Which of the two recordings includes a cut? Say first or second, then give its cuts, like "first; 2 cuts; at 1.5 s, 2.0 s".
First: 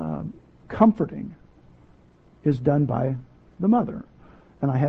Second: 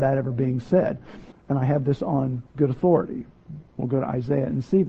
second; 2 cuts; at 1.3 s, 2.5 s